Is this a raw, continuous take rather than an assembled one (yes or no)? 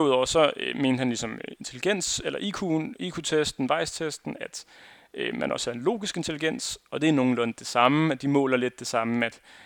yes